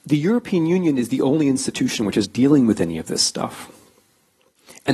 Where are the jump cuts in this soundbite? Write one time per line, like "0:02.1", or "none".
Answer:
0:02.2